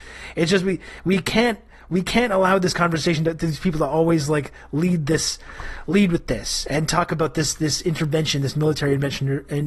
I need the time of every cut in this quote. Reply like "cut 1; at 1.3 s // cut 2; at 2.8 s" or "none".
none